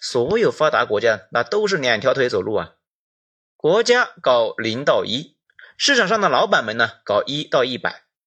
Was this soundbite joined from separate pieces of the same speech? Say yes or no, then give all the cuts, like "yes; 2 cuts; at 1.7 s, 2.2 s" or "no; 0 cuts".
no; 0 cuts